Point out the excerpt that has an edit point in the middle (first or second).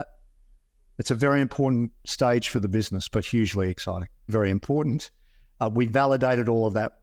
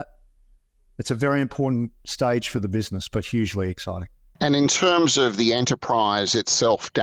first